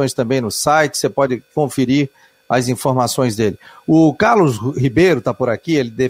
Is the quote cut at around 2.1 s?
no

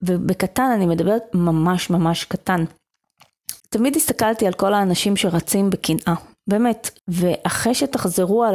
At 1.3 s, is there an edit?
no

